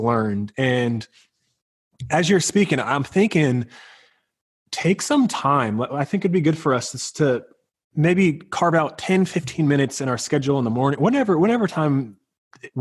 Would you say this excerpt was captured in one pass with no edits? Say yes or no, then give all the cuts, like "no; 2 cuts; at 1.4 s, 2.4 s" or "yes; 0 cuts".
yes; 0 cuts